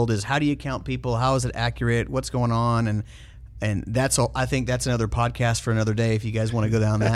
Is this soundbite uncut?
yes; 0 cuts

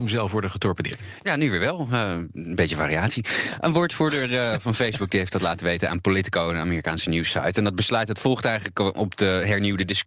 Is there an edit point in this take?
yes; 1 cut; at 1.2 s

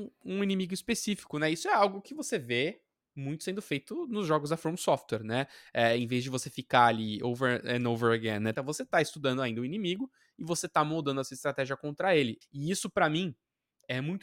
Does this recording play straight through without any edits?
no; 2 cuts; at 8.5 s, 12.4 s

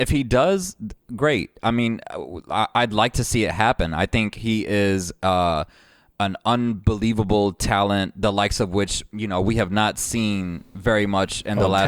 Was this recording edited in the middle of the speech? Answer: no; 0 cuts

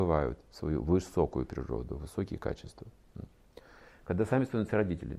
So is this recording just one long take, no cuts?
no; 1 cut; at 3.9 s

